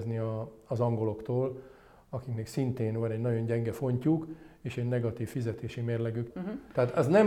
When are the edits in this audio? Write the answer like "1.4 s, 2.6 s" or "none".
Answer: 6.3 s